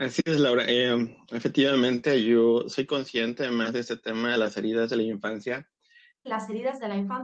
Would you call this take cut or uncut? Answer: cut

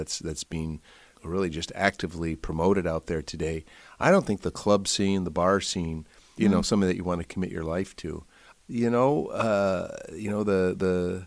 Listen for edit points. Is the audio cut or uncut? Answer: cut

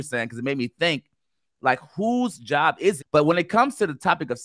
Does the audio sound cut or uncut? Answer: cut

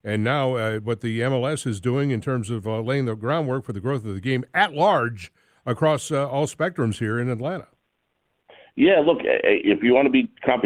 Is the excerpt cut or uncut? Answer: uncut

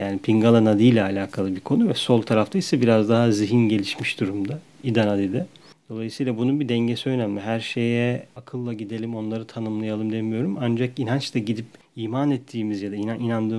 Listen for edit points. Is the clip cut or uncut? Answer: uncut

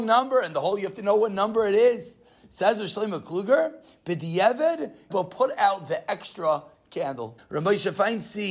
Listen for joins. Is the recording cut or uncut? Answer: cut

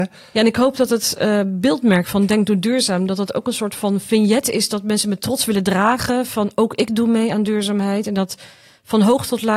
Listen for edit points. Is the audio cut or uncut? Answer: uncut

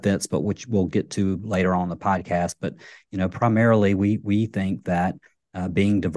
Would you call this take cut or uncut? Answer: uncut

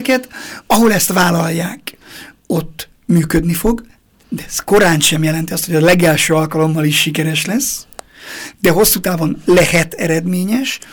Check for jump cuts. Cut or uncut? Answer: uncut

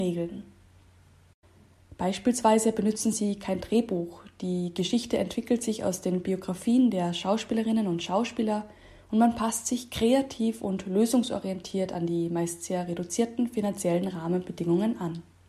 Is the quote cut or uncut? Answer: uncut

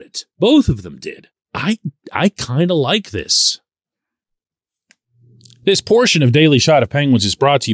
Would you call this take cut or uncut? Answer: cut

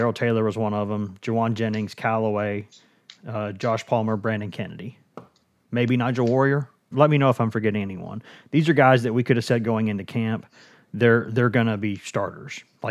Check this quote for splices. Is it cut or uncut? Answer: cut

